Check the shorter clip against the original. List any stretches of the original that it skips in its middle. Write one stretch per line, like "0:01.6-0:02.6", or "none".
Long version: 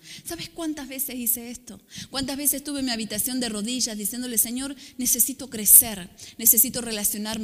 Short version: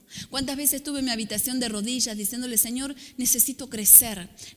none